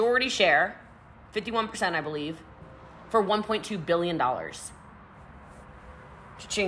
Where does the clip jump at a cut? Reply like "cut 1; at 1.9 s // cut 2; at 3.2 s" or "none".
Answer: none